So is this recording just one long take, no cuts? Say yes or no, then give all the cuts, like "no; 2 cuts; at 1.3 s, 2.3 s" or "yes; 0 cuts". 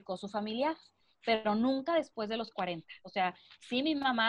yes; 0 cuts